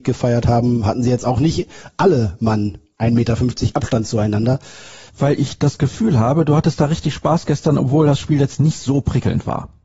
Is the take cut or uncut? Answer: cut